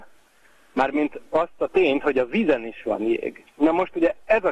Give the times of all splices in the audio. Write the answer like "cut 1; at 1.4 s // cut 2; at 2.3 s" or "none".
cut 1; at 3.5 s